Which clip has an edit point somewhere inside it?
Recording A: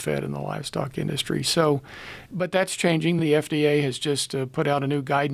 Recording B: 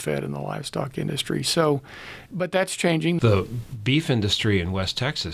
B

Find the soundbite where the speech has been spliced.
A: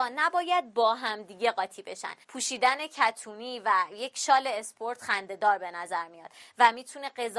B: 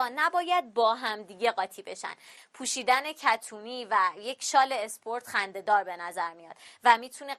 A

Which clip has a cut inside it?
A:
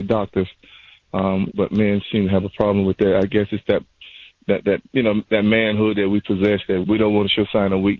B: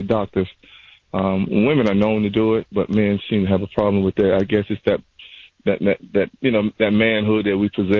A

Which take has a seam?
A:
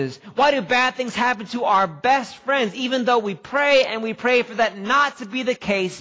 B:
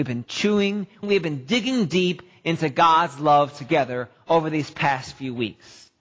B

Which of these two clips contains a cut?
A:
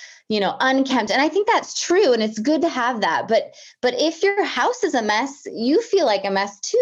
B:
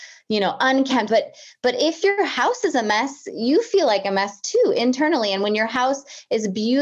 B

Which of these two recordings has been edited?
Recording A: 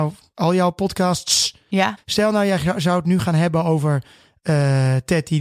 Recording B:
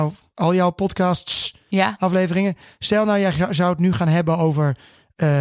A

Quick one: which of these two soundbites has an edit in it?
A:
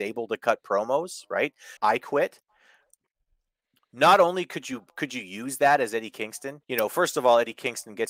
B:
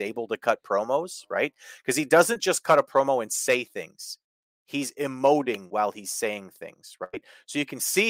A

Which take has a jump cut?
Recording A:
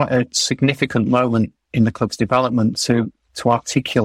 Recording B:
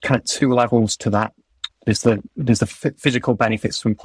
B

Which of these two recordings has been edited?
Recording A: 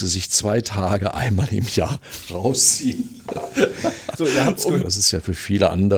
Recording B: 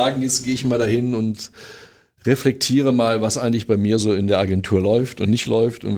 A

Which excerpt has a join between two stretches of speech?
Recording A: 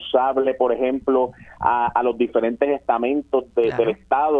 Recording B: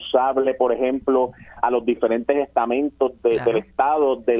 B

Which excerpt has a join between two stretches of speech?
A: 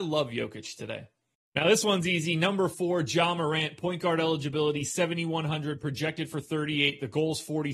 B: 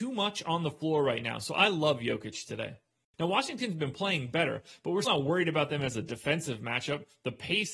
B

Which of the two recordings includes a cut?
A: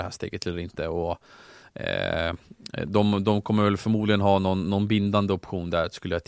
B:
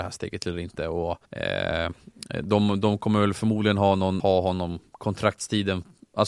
B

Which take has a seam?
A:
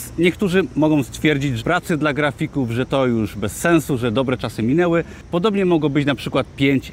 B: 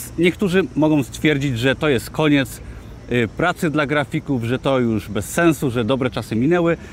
A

